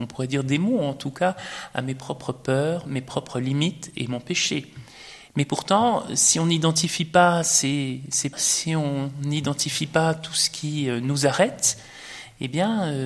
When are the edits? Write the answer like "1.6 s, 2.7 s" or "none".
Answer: 5.3 s, 8.3 s